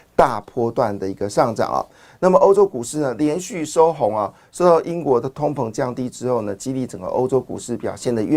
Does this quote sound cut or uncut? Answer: uncut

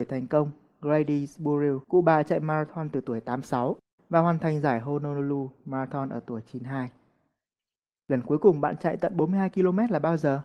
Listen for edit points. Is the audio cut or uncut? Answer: cut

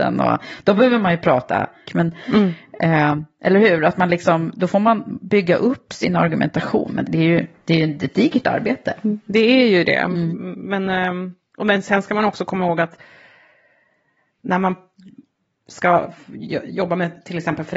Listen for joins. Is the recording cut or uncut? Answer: cut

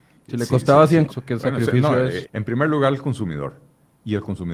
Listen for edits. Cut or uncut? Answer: cut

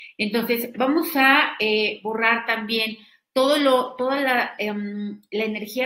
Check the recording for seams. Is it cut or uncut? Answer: uncut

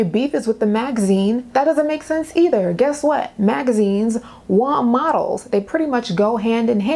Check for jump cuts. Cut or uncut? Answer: uncut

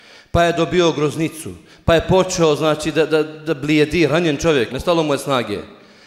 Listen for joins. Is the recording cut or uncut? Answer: cut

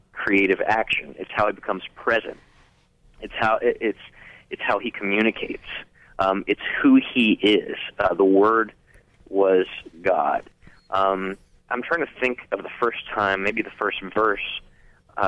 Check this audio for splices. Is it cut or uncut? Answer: cut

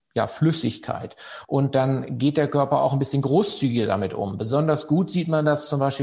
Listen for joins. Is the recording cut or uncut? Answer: cut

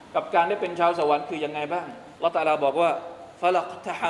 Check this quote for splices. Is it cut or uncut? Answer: cut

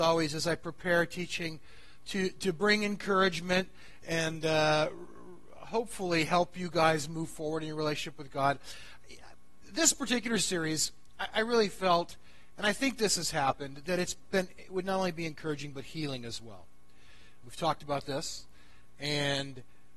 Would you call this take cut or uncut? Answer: cut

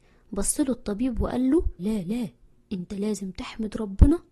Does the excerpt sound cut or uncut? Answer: cut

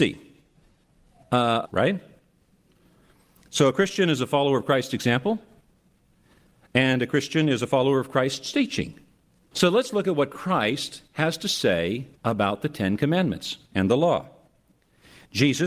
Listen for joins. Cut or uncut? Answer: cut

